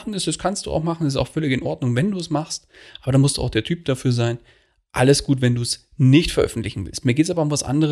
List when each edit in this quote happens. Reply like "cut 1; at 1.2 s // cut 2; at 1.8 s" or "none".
none